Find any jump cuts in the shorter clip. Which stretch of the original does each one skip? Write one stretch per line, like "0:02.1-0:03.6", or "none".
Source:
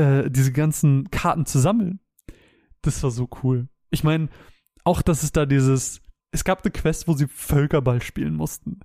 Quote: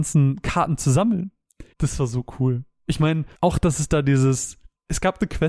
0:02.4-0:02.8
0:04.4-0:04.8